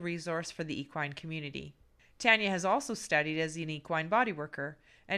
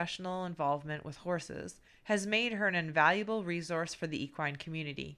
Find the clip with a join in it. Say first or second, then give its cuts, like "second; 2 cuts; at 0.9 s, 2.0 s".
second; 1 cut; at 1.9 s